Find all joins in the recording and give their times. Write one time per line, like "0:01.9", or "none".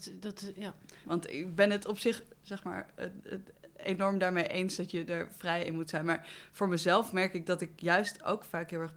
0:01.0